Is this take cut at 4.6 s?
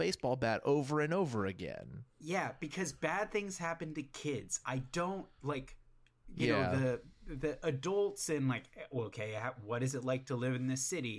no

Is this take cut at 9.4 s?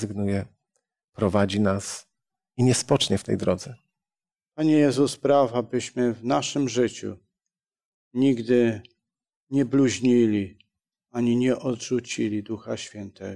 no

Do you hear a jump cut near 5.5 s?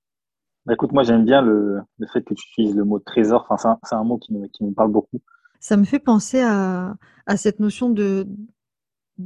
yes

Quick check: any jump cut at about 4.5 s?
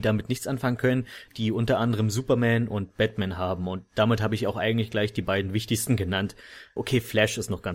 no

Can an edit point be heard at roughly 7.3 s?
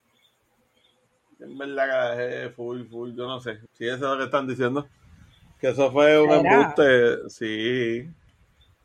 no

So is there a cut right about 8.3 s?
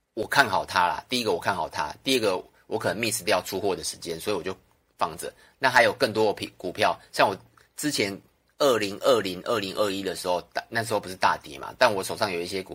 no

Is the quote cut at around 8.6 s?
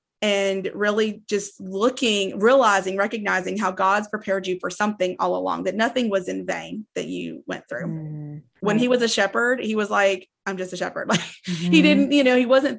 yes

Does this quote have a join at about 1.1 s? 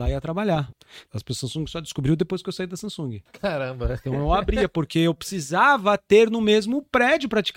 yes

